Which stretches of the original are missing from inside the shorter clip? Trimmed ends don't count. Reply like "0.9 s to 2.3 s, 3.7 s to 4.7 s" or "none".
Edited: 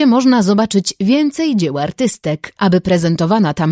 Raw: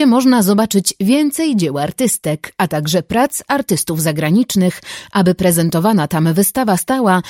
2.6 s to 5.1 s